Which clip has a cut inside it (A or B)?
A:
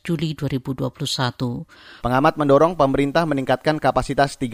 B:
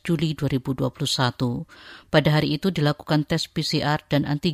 A